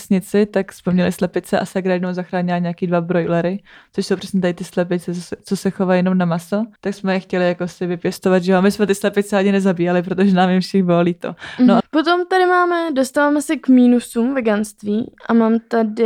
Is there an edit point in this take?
yes; 2 cuts; at 6.8 s, 11.8 s

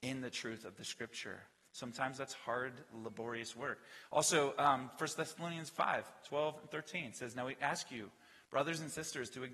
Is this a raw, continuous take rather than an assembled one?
yes; 0 cuts

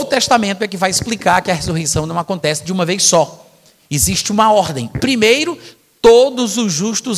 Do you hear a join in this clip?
no; 0 cuts

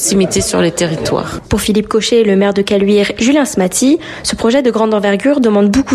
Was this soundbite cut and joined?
yes; 2 cuts; at 1.4 s, 3.2 s

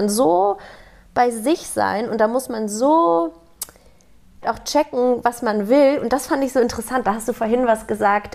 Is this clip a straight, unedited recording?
no; 1 cut; at 4.4 s

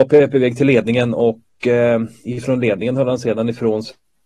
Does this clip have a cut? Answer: no; 0 cuts

